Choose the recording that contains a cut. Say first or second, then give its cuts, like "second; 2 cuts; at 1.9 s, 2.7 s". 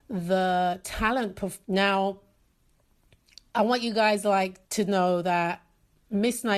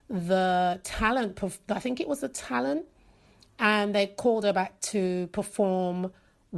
first; 2 cuts; at 1.6 s, 4.6 s